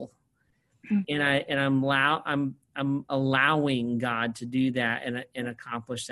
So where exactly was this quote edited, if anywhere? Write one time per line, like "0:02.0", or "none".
0:01.0

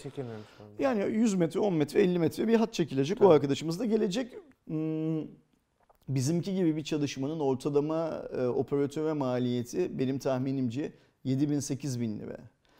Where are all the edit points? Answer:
0:04.6

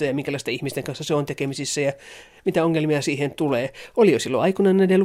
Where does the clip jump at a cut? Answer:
none

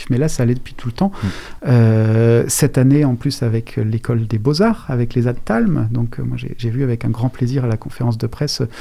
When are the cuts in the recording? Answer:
0:01.6

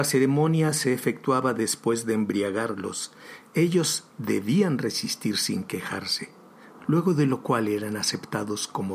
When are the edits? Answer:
none

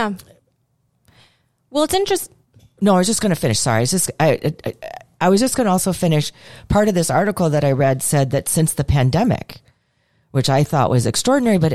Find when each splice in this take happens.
none

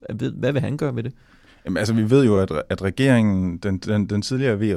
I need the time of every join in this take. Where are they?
none

